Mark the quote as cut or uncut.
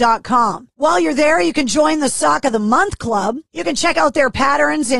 cut